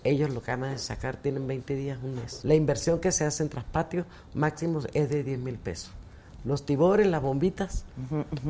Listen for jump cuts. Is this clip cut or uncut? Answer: cut